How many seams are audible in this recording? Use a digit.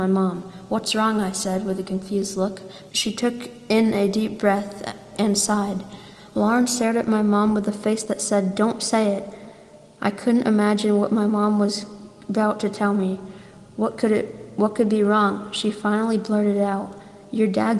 1